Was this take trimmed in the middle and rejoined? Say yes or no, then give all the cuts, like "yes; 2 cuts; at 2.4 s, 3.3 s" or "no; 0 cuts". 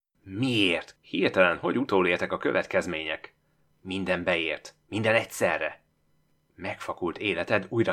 yes; 2 cuts; at 1.0 s, 3.7 s